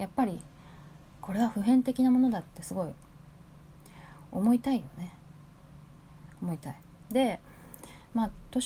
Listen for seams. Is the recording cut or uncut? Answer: cut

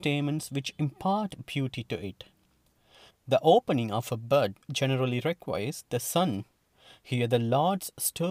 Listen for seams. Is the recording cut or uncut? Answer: cut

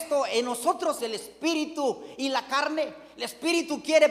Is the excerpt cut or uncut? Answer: cut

